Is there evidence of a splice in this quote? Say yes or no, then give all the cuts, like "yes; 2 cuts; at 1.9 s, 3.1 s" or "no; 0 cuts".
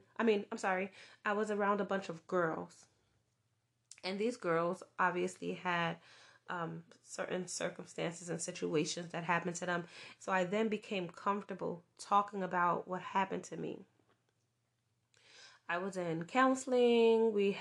yes; 1 cut; at 10.2 s